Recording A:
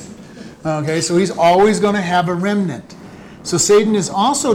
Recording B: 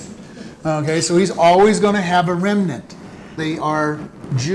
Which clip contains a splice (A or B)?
B